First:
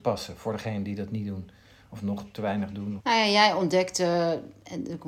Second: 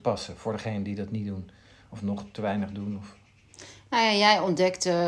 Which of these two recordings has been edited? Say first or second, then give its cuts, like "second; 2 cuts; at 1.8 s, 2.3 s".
first; 1 cut; at 3.0 s